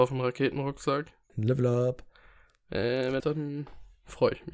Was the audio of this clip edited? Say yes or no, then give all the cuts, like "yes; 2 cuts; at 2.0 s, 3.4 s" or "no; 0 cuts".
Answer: yes; 2 cuts; at 1.3 s, 3.2 s